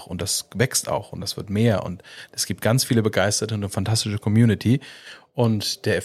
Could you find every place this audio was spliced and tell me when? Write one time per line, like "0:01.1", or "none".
none